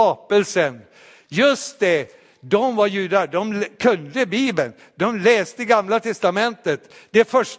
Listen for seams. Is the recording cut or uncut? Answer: uncut